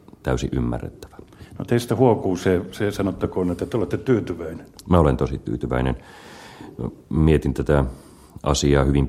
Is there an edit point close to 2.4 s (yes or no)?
no